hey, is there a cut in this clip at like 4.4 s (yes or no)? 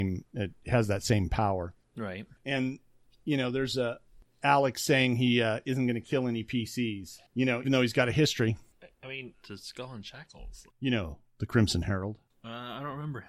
no